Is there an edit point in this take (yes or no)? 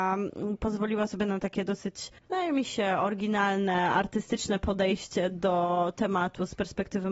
yes